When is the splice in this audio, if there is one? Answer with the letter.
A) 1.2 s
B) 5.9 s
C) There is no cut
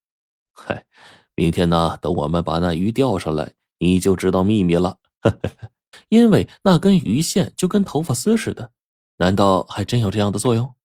B